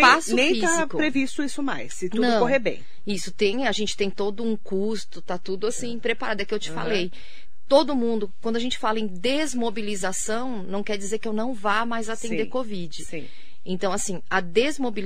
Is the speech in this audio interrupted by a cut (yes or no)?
no